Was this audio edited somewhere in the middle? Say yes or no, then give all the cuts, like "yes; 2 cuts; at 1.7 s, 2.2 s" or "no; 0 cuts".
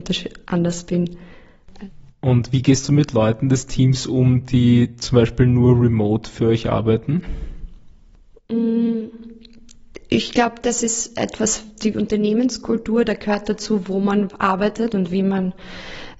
no; 0 cuts